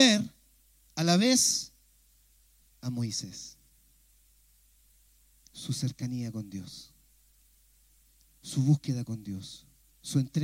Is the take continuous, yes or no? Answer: yes